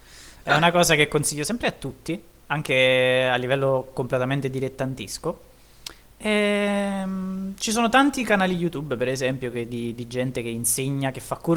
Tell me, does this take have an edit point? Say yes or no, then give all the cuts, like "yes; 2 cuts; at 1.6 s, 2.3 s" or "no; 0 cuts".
no; 0 cuts